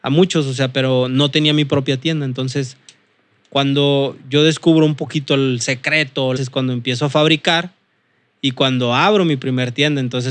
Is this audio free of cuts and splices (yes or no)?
no